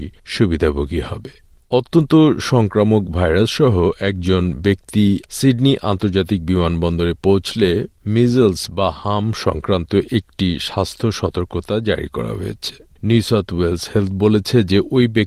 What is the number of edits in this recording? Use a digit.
0